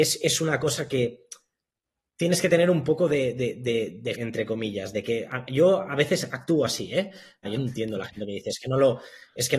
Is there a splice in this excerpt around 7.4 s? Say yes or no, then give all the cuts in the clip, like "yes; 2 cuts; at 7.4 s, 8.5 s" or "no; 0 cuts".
yes; 2 cuts; at 4.1 s, 7.4 s